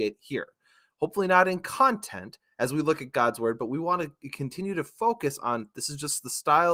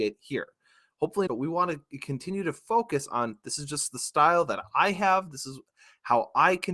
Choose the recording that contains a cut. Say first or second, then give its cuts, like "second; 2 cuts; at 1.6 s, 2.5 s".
second; 1 cut; at 1.3 s